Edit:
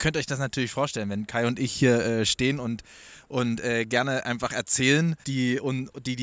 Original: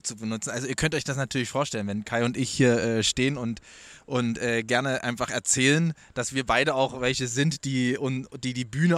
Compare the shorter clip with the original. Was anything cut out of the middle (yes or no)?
yes